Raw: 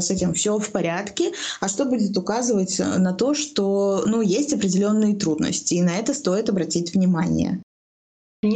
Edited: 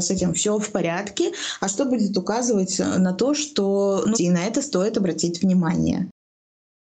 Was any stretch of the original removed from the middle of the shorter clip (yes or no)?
yes